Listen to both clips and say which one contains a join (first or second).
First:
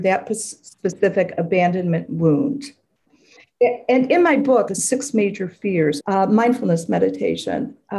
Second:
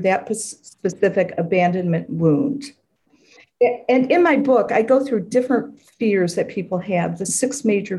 first